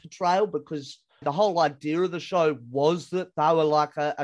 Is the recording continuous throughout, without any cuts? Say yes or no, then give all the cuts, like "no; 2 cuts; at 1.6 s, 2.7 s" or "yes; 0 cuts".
no; 1 cut; at 1.2 s